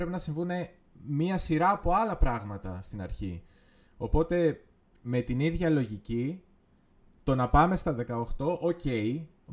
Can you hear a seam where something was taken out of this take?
no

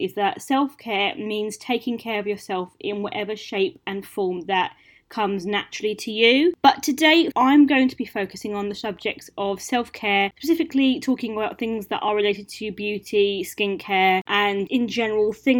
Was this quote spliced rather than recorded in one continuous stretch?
yes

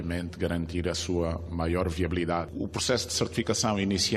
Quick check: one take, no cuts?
yes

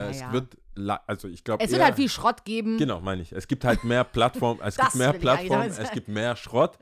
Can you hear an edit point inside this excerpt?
no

